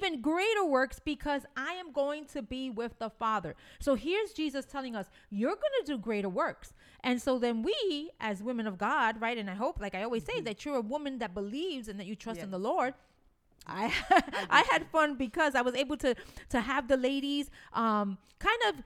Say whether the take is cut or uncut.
cut